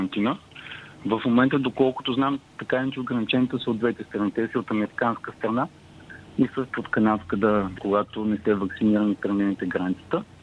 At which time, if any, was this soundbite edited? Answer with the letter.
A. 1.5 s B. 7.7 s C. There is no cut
B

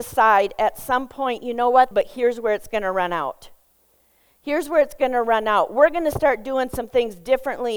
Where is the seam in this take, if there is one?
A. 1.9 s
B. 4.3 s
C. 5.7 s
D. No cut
A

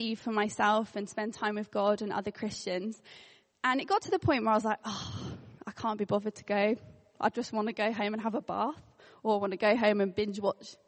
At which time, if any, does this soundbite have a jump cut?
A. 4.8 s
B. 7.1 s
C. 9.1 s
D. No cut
D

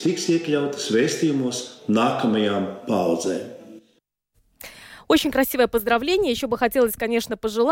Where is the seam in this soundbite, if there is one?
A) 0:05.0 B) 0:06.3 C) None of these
C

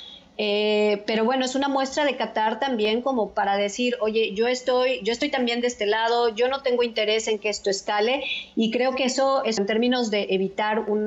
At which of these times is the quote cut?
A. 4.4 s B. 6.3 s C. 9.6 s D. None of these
C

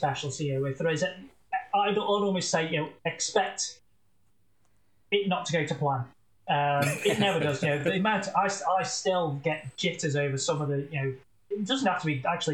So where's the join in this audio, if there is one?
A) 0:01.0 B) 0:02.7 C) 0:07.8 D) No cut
D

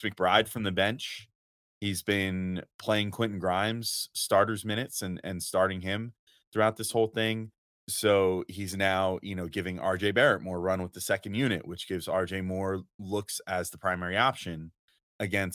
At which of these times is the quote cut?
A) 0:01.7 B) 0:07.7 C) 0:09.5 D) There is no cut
B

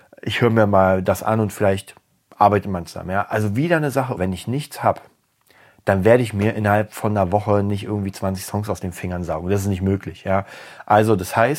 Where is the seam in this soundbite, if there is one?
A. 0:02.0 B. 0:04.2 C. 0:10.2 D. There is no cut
B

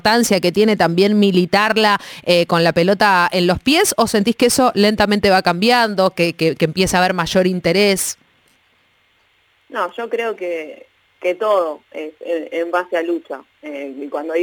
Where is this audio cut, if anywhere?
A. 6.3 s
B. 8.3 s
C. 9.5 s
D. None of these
D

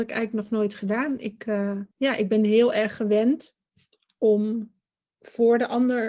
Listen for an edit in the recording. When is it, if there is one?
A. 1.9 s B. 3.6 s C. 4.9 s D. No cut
A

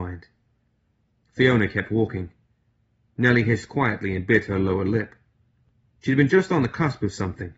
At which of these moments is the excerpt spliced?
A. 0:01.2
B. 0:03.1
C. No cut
C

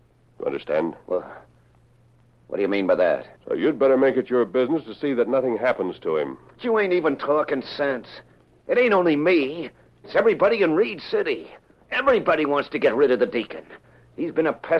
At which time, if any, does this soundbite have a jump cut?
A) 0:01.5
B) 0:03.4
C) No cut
B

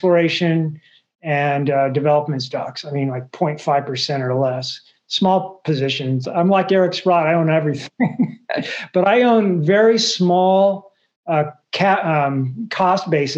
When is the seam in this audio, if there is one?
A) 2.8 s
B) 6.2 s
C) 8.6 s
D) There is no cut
B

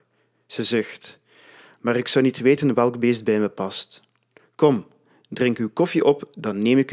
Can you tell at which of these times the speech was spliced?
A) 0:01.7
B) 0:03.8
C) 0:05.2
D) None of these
D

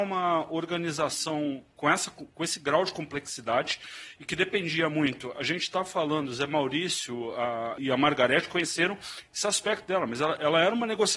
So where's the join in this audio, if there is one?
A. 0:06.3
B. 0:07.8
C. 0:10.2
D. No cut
B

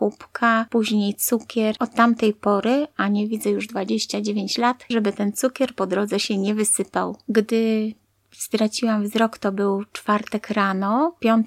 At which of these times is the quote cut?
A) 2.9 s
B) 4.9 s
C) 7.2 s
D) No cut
B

